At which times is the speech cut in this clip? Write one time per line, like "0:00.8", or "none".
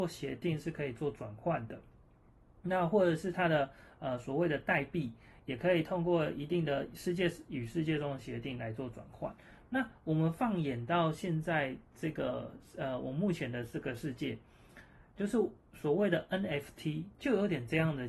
none